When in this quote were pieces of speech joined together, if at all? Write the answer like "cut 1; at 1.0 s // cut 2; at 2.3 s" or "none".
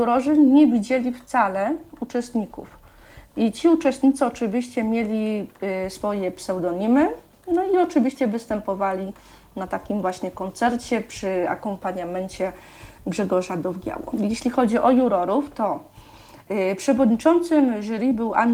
none